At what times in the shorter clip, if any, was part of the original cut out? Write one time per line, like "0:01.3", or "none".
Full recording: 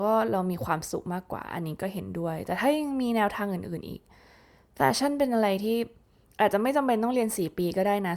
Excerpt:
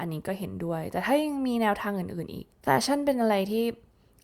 0:02.5